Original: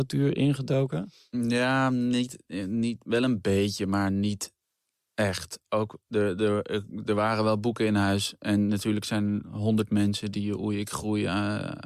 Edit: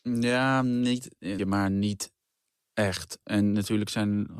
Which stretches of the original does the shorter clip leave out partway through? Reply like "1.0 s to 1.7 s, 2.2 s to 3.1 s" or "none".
2.7 s to 3.8 s, 5.6 s to 8.4 s